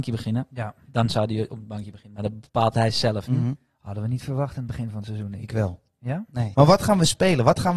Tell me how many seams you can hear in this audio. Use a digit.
2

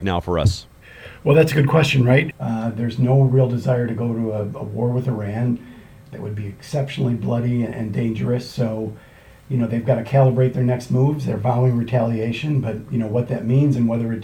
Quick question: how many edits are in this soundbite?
1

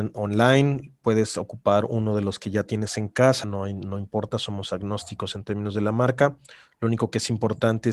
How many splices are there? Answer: 1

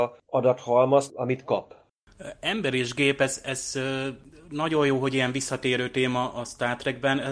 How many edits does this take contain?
1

